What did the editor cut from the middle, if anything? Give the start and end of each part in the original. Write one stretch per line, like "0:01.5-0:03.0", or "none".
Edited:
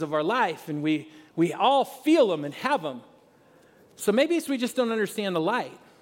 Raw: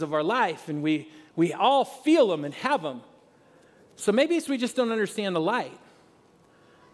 none